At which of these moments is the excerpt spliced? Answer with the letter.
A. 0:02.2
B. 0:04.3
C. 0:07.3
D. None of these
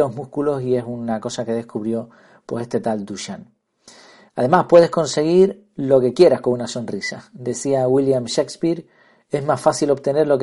B